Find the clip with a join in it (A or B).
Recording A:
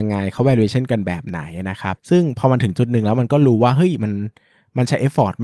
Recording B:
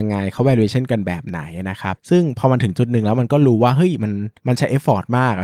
B